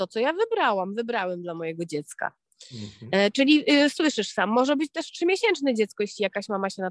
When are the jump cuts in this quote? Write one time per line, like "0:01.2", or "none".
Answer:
none

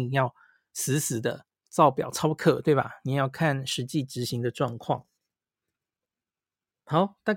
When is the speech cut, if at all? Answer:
none

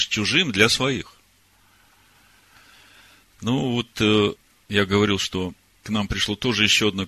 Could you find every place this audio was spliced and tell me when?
none

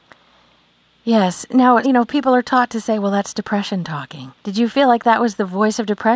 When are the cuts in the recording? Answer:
0:01.8
0:04.4

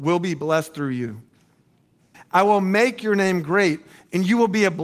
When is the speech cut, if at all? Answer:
0:02.1

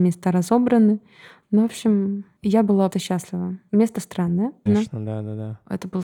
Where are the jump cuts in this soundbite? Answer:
0:02.9
0:04.7

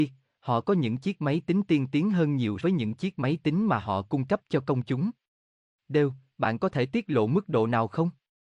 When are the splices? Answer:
0:02.6
0:05.7

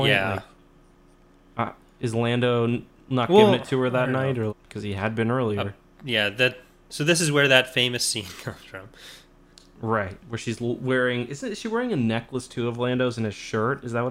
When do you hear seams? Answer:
0:04.5

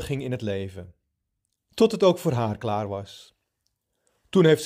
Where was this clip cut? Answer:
none

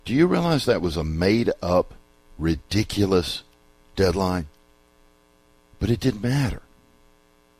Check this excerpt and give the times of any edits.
none

